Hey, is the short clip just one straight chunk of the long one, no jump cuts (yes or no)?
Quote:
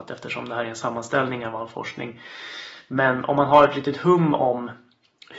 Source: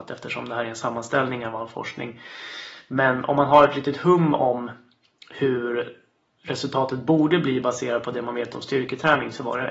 yes